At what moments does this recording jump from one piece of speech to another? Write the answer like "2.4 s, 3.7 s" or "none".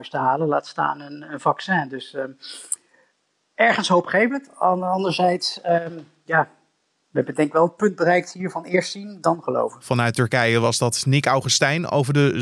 none

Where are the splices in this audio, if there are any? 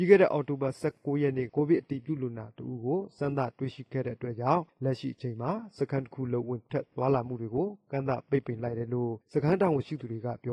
1.5 s

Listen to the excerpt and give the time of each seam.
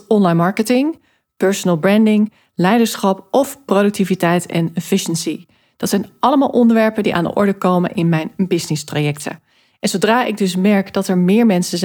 none

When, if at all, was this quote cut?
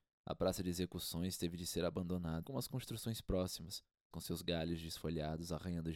2.4 s, 4.1 s

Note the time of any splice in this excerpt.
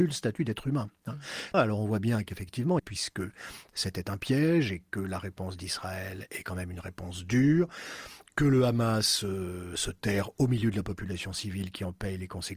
1.5 s, 2.8 s

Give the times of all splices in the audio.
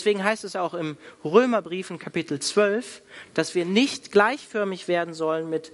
none

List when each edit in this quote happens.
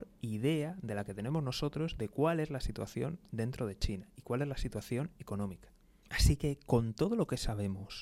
6.0 s

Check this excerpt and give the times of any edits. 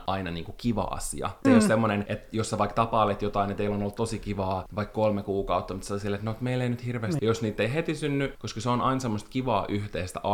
1.4 s, 7.2 s, 8.3 s

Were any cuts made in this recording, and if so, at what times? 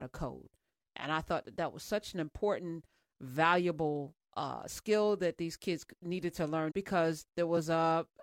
6.7 s

